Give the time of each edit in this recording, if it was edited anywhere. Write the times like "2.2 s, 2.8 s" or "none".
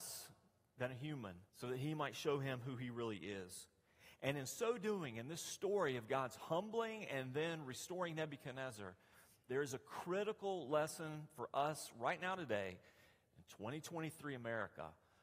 1.5 s